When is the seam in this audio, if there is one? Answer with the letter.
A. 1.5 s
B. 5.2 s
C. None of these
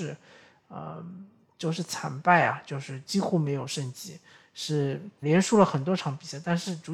B